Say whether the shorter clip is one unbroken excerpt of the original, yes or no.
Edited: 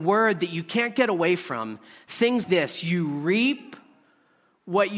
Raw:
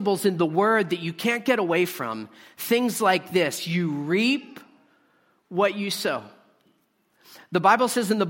no